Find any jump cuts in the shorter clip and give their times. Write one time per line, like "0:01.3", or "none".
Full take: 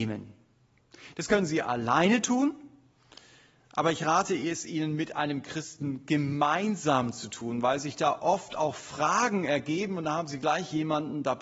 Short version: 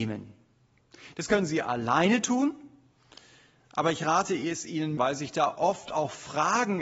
0:05.0